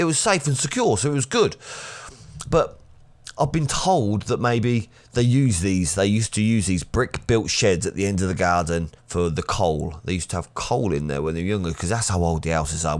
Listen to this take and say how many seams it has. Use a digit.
1